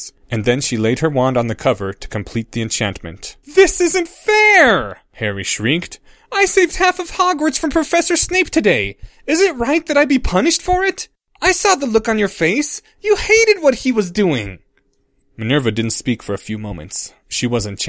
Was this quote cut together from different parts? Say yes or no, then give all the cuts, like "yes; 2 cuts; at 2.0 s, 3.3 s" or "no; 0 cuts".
yes; 1 cut; at 3.4 s